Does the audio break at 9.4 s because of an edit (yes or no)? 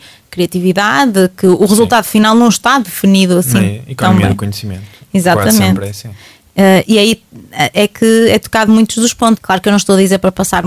yes